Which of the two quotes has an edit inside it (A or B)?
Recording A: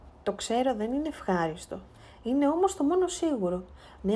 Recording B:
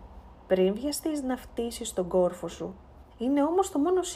B